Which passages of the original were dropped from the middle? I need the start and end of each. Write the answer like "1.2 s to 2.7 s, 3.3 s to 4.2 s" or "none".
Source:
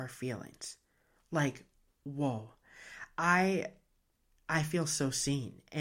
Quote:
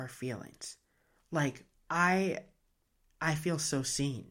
1.9 s to 3.2 s